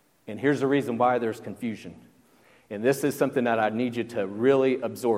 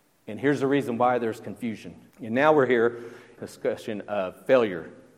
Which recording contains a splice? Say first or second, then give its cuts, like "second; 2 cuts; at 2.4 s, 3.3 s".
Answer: second; 2 cuts; at 2.1 s, 3.4 s